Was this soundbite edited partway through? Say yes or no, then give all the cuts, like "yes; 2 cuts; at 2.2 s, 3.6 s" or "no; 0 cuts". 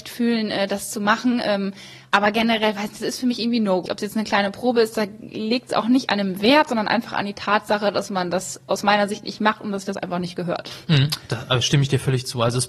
yes; 1 cut; at 3.9 s